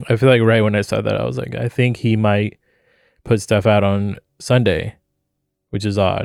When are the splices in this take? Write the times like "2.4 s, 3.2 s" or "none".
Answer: none